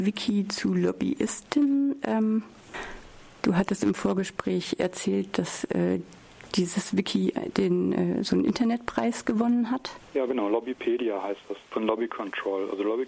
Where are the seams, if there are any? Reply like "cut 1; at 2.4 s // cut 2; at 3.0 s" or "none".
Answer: none